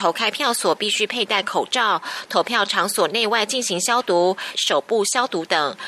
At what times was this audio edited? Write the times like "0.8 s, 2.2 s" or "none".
4.5 s